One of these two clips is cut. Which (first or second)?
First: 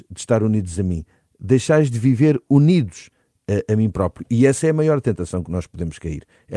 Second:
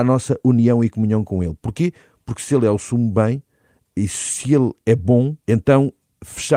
second